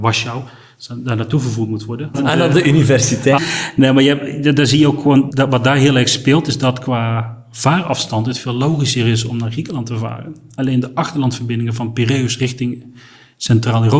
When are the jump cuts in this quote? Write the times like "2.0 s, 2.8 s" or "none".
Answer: 2.1 s, 3.4 s, 5.3 s